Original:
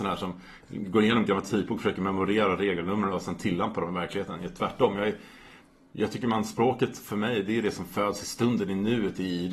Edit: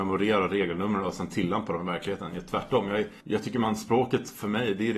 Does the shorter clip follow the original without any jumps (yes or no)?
no